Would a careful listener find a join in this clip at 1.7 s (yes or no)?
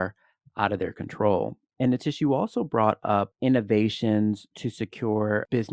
no